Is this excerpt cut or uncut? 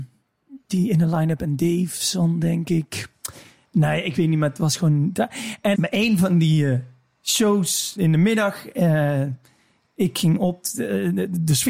cut